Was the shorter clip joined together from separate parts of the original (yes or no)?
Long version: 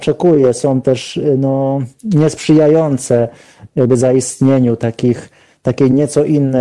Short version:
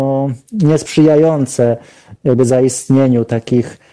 no